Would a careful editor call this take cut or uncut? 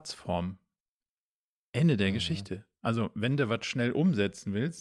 uncut